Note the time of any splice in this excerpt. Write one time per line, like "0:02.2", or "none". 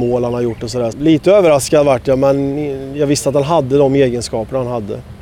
0:00.9